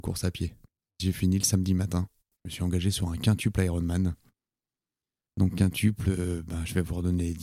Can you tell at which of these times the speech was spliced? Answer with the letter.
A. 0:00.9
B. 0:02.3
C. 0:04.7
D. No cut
B